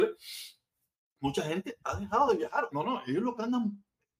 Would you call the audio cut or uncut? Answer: cut